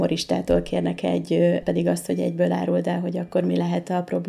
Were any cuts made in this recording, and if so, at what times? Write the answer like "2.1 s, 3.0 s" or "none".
1.6 s